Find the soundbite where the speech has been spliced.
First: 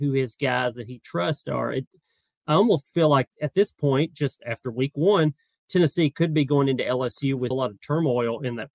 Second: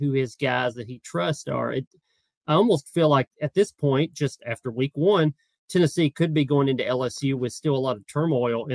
first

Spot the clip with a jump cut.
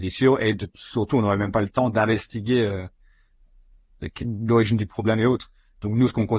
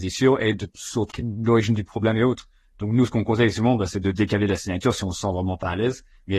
second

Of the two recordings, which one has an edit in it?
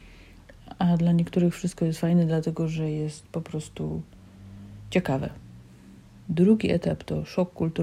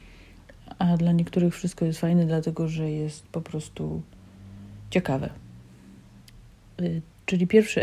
first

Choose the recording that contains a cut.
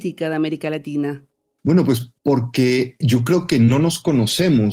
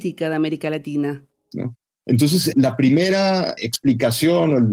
second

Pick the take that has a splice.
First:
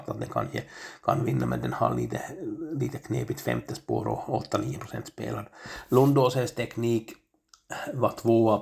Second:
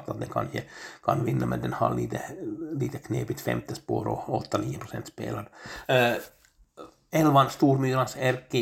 second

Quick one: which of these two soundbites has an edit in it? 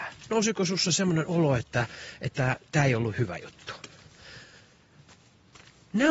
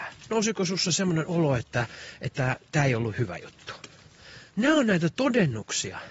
second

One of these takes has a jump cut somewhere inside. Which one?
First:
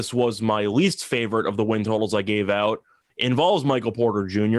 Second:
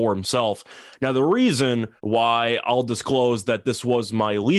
second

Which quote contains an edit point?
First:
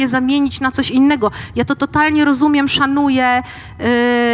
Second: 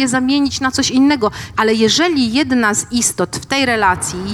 second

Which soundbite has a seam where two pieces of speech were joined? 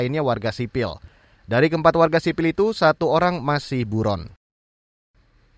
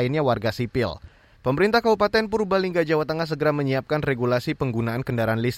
second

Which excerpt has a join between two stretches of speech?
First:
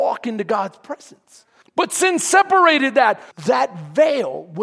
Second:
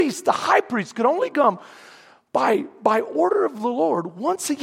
first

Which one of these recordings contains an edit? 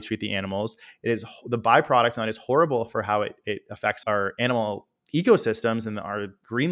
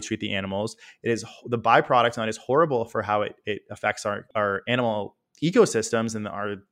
first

